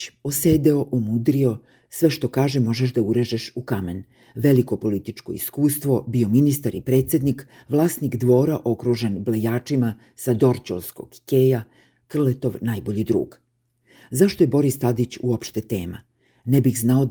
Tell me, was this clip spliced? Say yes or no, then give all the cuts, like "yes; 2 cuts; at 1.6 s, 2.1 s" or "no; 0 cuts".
no; 0 cuts